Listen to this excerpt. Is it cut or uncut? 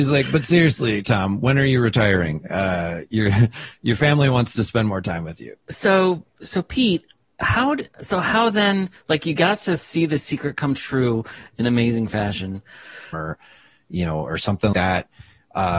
cut